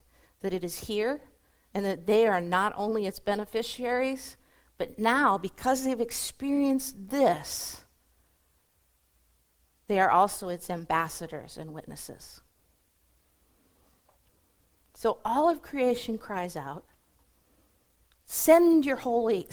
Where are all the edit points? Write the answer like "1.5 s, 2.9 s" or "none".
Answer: none